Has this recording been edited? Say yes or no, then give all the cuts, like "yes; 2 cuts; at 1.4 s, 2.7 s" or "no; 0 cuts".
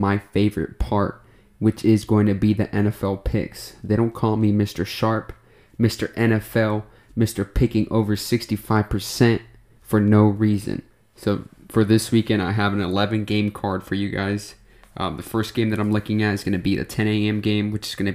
no; 0 cuts